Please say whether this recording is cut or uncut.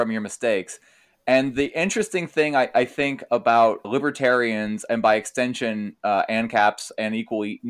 cut